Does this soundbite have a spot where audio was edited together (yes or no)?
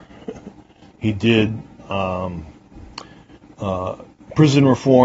yes